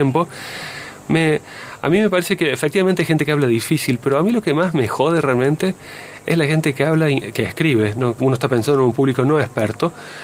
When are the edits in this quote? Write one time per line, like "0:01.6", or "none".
0:08.2

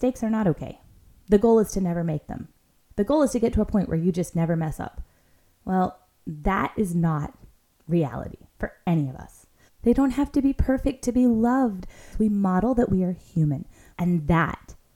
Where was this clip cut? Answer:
0:09.7
0:12.1
0:13.9

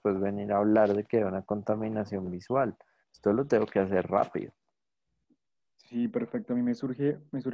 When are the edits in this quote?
none

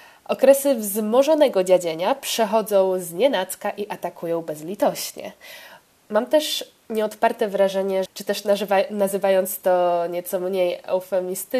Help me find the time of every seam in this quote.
0:05.9
0:08.1

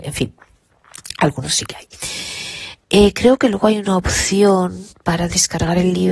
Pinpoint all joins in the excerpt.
0:02.8

